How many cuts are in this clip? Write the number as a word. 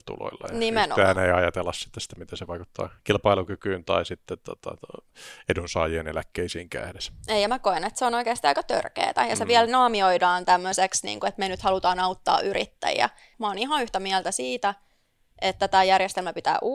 one